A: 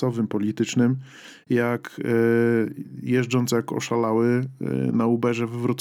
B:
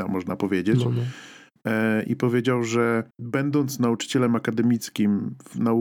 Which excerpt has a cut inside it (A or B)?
B